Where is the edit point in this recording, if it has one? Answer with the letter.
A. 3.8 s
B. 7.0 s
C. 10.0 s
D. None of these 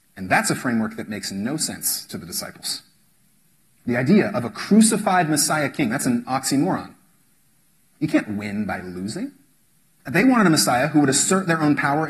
C